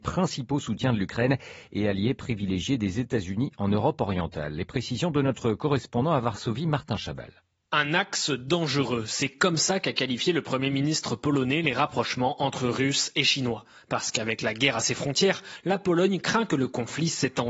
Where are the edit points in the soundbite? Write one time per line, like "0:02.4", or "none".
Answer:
none